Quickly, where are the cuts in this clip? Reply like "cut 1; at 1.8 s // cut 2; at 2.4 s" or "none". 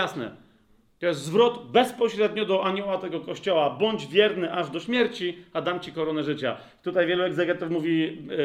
none

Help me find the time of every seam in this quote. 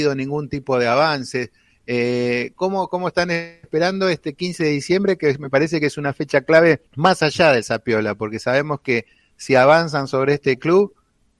cut 1; at 6.9 s

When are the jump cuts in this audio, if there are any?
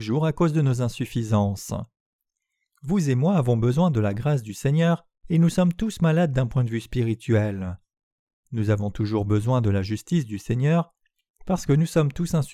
none

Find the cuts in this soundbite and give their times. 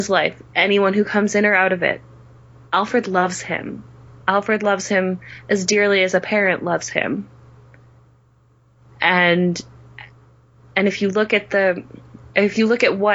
none

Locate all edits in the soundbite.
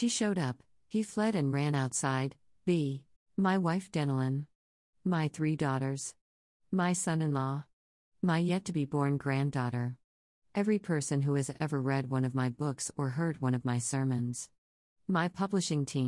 cut 1; at 3.2 s

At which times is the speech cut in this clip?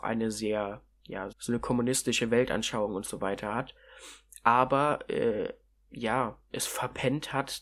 cut 1; at 1.3 s

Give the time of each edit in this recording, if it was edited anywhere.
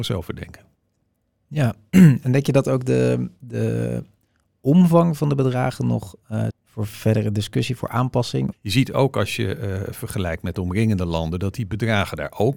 cut 1; at 6.5 s // cut 2; at 8.5 s

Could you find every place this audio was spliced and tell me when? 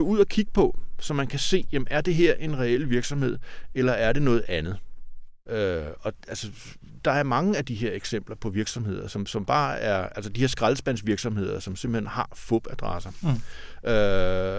cut 1; at 5.5 s

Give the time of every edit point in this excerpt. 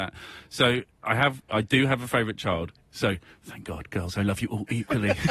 cut 1; at 2.9 s // cut 2; at 4.1 s

